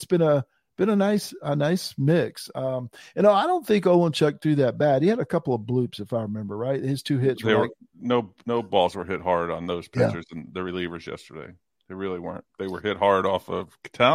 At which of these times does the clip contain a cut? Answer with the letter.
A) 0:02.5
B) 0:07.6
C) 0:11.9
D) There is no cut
D